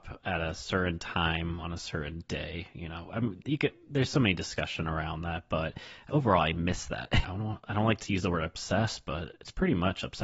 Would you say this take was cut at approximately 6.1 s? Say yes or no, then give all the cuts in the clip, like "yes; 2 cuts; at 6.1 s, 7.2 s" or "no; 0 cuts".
yes; 2 cuts; at 6.1 s, 7.2 s